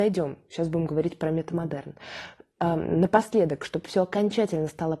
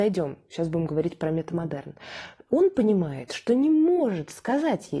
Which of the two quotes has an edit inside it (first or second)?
second